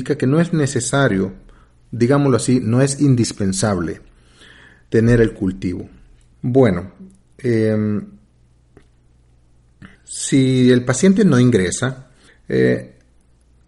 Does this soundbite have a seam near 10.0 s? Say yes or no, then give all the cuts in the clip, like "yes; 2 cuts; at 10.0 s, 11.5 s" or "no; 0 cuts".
yes; 3 cuts; at 6.3 s, 10.0 s, 12.3 s